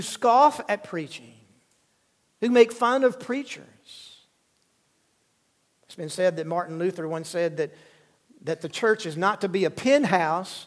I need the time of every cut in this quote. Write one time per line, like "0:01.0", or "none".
none